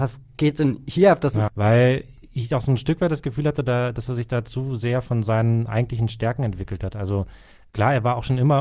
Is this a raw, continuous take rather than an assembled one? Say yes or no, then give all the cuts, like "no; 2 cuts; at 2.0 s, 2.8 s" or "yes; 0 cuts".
no; 1 cut; at 1.5 s